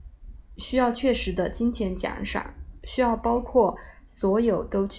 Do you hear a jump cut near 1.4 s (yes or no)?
no